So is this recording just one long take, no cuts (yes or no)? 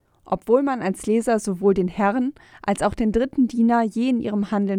yes